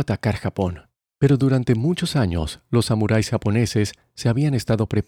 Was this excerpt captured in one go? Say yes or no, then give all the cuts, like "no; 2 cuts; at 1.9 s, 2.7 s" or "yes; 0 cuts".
no; 1 cut; at 1.1 s